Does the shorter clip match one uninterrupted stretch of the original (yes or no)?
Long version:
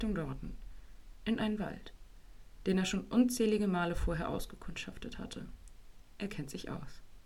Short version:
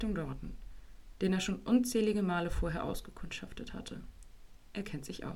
no